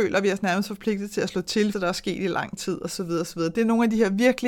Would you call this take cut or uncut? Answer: cut